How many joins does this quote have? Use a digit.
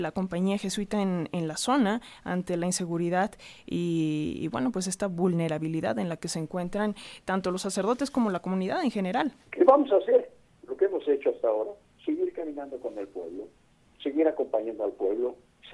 1